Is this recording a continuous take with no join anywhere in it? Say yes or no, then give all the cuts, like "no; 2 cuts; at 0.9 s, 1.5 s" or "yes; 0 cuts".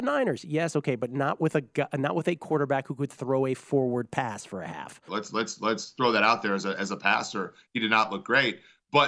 no; 1 cut; at 5.1 s